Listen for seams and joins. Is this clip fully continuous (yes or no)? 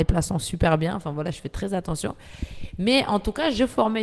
yes